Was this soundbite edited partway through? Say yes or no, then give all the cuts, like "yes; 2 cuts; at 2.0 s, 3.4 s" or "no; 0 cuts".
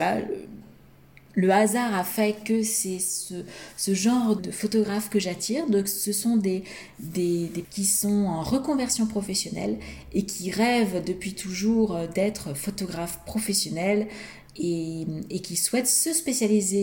yes; 2 cuts; at 4.4 s, 7.6 s